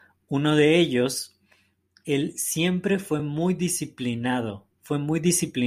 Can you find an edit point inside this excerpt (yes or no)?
no